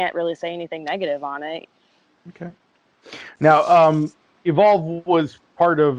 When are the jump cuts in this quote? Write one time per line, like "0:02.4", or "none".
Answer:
none